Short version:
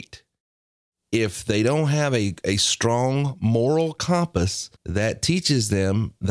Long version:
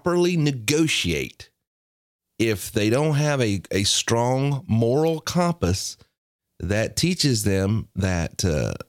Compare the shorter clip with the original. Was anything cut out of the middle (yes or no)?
yes